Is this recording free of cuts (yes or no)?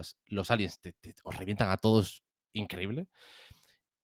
yes